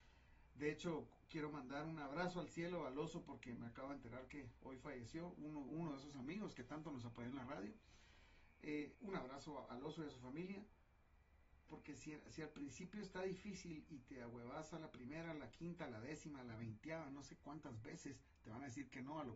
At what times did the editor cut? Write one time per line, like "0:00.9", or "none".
0:08.9
0:11.7